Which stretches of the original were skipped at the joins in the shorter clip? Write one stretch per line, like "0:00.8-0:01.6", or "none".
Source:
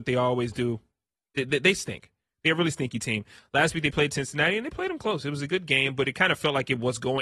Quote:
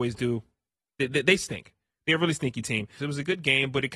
0:03.4-0:05.2